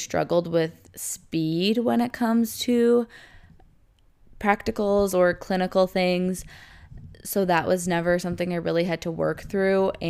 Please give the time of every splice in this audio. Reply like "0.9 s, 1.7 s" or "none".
none